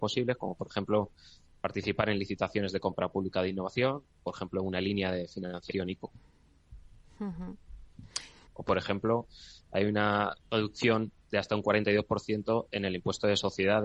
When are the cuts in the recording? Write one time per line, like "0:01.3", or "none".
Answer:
0:08.5
0:10.4